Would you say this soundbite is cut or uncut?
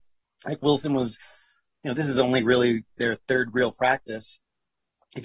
uncut